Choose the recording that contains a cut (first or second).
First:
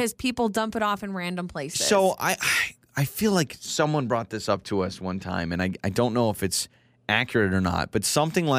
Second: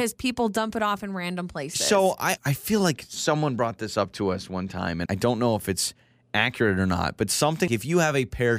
second